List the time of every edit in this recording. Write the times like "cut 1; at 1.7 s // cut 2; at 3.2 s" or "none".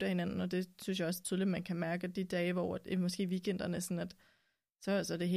none